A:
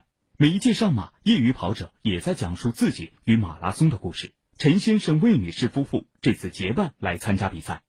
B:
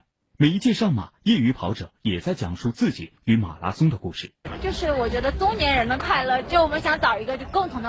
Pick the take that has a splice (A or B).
B